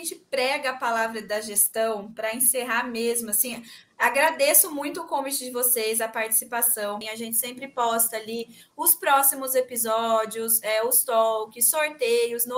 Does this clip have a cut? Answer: yes; 1 cut; at 7.0 s

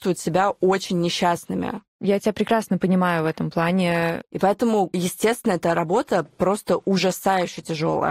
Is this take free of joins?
no; 1 cut; at 4.2 s

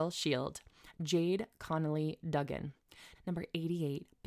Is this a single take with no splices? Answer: no; 2 cuts; at 0.9 s, 3.1 s

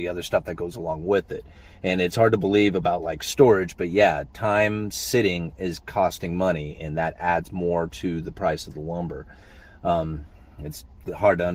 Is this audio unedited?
yes; 0 cuts

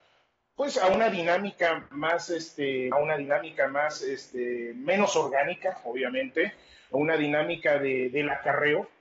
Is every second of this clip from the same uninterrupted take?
no; 1 cut; at 2.9 s

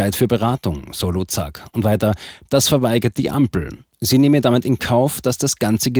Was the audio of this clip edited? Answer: no; 0 cuts

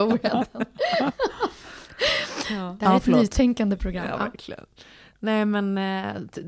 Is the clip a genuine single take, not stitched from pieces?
yes; 0 cuts

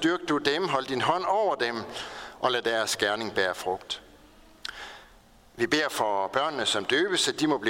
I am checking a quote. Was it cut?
no; 0 cuts

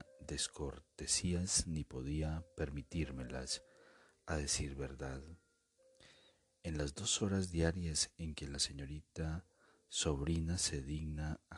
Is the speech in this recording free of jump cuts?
yes; 0 cuts

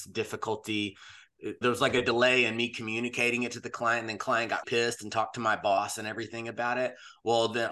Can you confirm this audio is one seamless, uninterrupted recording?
no; 2 cuts; at 1.6 s, 4.6 s

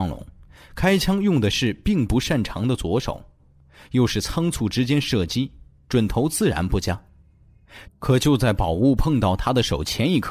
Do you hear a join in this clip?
yes; 1 cut; at 7.8 s

